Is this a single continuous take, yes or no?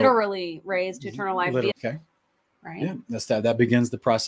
no